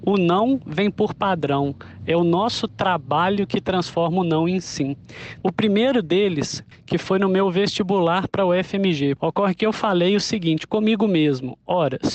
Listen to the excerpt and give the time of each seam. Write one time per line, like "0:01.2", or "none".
0:05.4
0:06.7
0:09.2